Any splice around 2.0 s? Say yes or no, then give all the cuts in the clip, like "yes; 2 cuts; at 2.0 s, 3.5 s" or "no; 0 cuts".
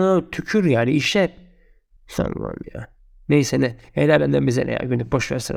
yes; 1 cut; at 2.0 s